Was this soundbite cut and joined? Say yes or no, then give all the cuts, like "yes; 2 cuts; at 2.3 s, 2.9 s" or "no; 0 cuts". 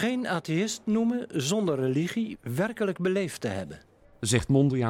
yes; 1 cut; at 2.3 s